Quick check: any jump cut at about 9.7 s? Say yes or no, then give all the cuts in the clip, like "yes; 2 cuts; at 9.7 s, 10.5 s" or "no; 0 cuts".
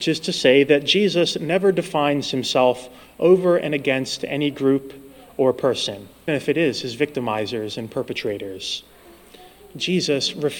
no; 1 cut; at 6.3 s